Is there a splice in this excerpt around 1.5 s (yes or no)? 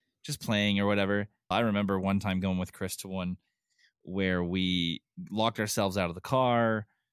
yes